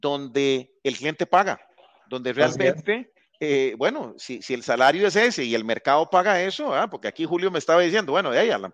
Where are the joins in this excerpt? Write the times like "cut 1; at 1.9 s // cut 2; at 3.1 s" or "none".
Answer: none